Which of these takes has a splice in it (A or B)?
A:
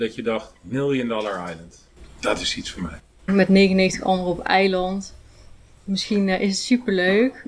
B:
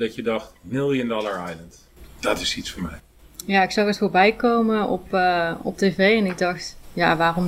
A